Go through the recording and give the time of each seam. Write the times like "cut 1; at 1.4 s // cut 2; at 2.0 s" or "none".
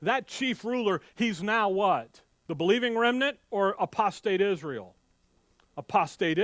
cut 1; at 2.5 s